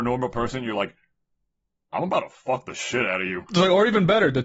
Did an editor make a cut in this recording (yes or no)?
no